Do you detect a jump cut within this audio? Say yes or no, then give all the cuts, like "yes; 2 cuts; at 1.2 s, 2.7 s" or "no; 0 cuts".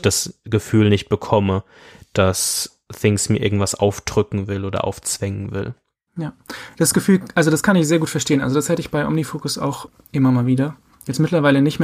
no; 0 cuts